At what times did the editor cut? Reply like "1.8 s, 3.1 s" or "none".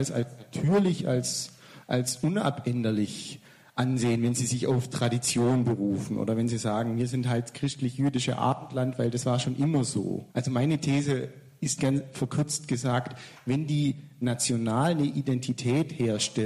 10.3 s